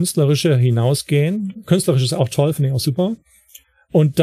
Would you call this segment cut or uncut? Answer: uncut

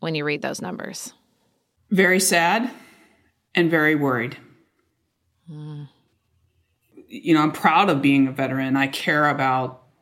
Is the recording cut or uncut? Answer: uncut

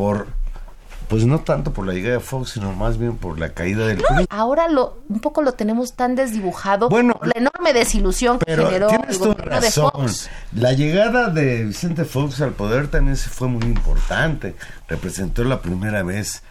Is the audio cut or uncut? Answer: cut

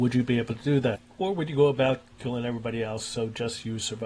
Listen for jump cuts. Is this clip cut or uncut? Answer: uncut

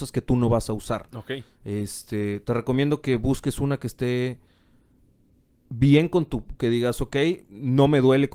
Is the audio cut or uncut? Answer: cut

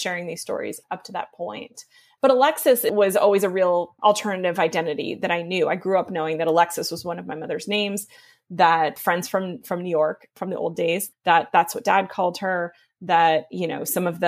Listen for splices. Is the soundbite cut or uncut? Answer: cut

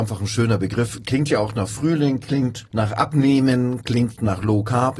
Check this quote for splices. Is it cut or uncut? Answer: cut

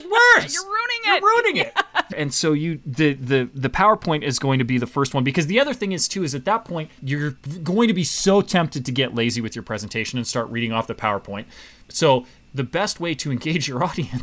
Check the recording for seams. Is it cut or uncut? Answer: cut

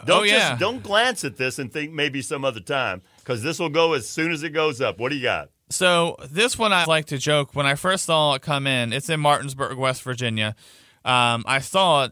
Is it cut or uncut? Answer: cut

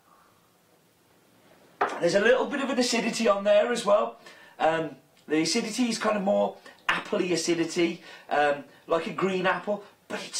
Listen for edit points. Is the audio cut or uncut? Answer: uncut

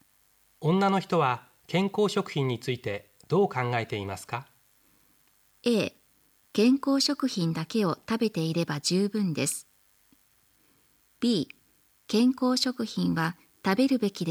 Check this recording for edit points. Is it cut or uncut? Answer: uncut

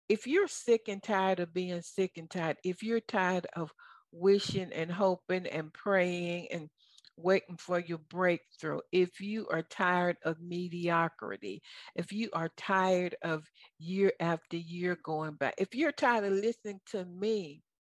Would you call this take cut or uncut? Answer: uncut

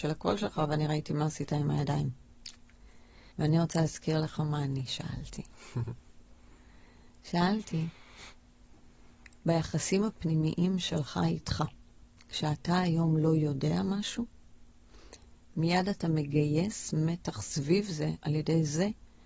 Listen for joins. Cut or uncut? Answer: cut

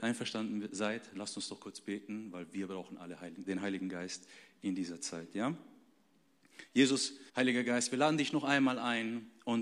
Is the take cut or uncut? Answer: cut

